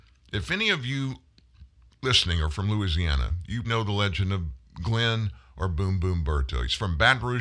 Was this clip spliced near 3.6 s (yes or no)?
yes